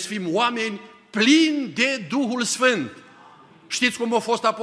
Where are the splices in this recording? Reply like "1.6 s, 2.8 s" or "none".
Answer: none